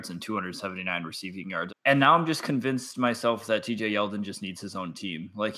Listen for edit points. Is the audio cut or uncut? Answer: cut